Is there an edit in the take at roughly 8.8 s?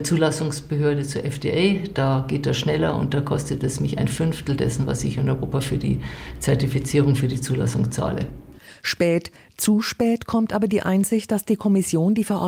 no; 0 cuts

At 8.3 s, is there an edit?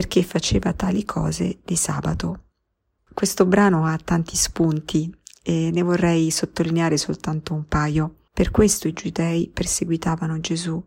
yes; 2 cuts; at 3.0 s, 8.3 s

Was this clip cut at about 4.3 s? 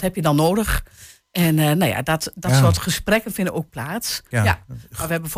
yes; 1 cut; at 4.3 s

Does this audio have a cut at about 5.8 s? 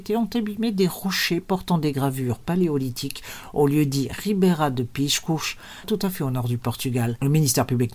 yes; 1 cut; at 5.8 s

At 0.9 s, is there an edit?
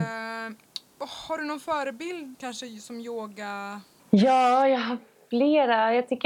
no; 2 cuts; at 2.3 s, 4.0 s

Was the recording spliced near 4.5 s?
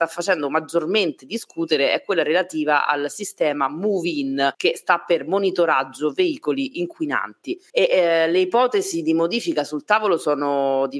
yes; 2 cuts; at 4.5 s, 7.7 s

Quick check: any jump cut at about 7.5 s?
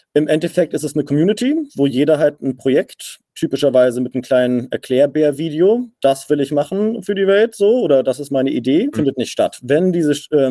no; 1 cut; at 8.9 s

